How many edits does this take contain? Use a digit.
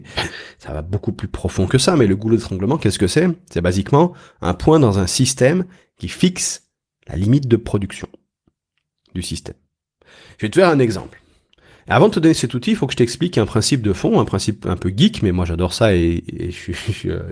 1